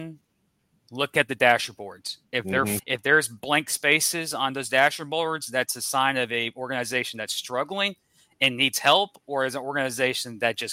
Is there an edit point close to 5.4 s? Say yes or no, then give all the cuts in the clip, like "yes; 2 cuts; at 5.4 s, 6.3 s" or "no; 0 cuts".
no; 1 cut; at 2.8 s